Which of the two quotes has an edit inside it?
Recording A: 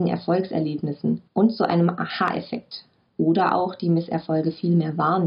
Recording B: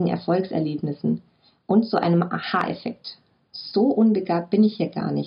A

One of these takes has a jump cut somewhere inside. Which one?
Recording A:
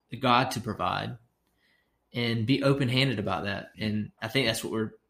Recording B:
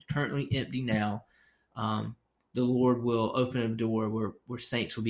A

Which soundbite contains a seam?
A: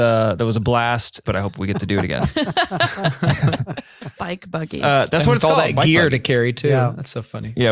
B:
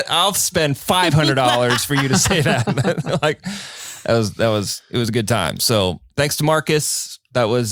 A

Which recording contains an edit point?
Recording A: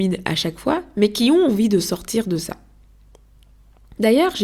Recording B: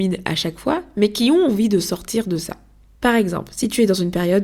B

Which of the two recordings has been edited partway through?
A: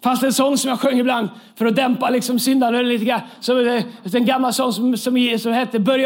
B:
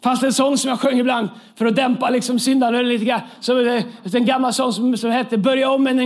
B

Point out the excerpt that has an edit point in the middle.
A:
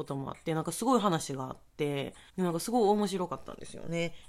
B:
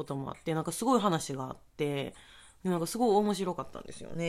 A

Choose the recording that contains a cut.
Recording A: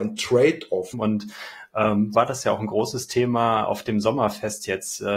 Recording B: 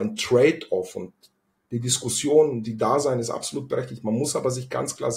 A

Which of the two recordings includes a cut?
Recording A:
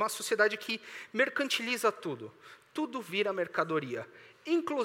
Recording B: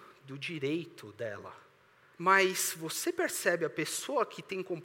B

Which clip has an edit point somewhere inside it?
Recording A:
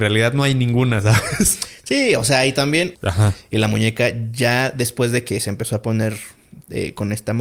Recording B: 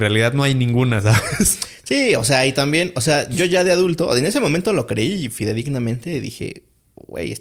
A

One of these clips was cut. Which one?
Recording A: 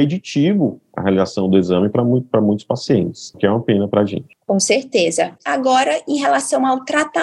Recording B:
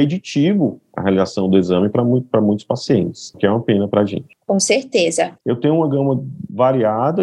B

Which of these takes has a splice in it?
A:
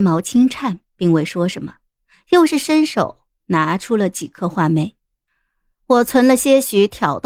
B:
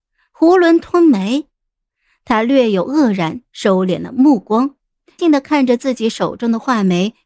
B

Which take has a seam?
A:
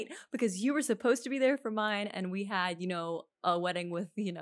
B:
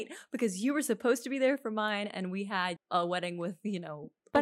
B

